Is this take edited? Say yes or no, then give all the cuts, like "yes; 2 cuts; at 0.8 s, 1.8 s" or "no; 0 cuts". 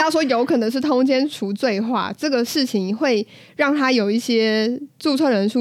no; 0 cuts